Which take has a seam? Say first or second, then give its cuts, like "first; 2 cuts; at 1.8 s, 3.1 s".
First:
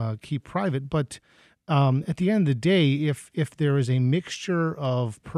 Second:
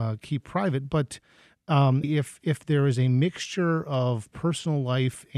second; 1 cut; at 2.0 s